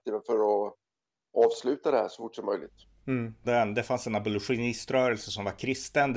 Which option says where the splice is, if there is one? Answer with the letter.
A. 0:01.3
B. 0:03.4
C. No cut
B